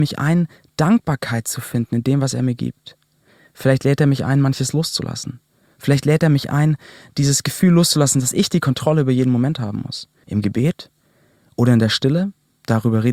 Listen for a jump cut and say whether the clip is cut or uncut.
cut